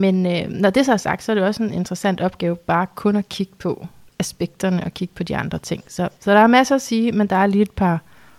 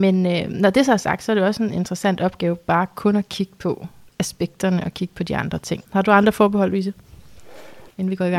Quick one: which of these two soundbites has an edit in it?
second; 1 cut; at 5.8 s

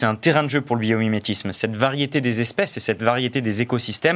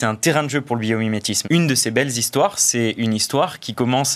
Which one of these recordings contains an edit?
second; 1 cut; at 1.4 s

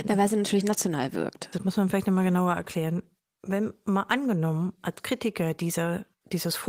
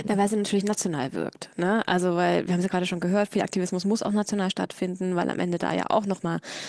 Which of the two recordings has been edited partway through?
first; 1 cut; at 1.5 s

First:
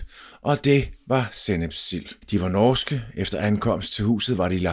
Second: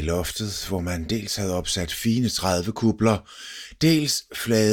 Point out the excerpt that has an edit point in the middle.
first; 1 cut; at 2.2 s

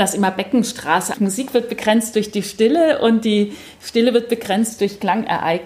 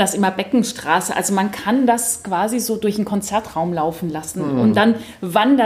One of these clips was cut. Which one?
first; 1 cut; at 1.1 s

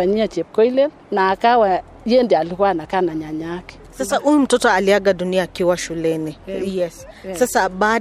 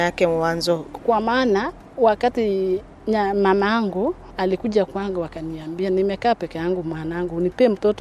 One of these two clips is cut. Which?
second; 1 cut; at 1.0 s

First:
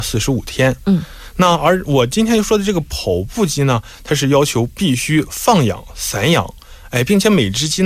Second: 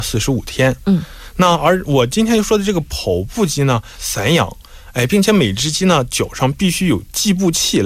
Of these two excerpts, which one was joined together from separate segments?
second; 1 cut; at 4.0 s

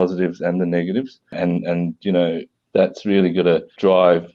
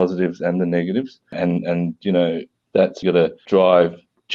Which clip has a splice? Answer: second; 1 cut; at 3.0 s

